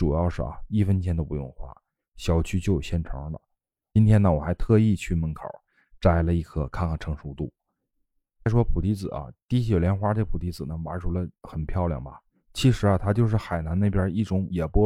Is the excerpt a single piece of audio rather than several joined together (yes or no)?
yes